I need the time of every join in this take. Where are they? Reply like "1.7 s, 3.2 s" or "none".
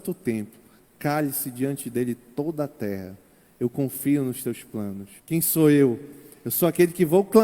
5.2 s